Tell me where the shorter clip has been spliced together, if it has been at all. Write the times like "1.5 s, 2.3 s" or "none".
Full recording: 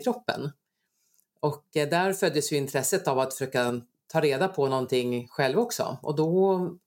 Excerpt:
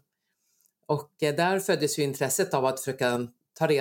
none